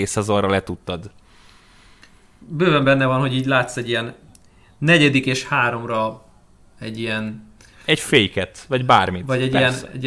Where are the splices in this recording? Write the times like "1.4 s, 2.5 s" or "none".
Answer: none